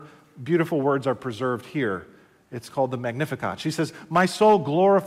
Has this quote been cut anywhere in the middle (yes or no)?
no